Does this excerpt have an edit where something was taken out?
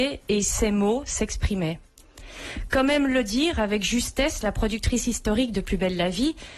no; 0 cuts

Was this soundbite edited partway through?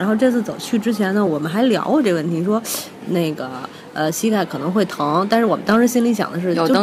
no; 0 cuts

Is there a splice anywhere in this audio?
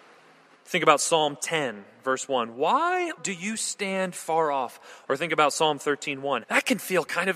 yes; 3 cuts; at 3.2 s, 5.1 s, 6.4 s

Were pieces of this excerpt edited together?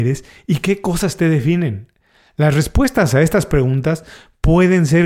no; 0 cuts

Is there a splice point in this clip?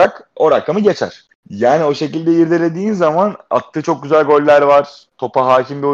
yes; 1 cut; at 1.3 s

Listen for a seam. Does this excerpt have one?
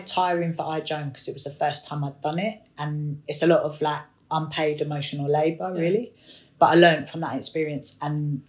no; 0 cuts

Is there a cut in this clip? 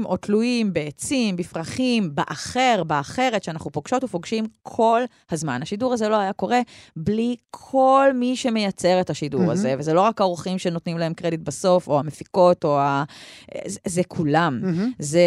no; 0 cuts

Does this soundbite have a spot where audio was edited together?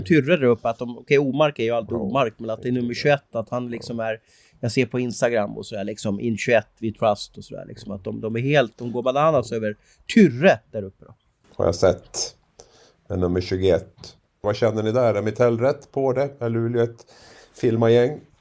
yes; 2 cuts; at 11.4 s, 14.4 s

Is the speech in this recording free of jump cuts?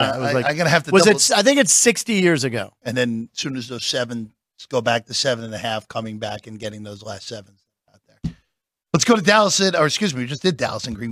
no; 1 cut; at 2.8 s

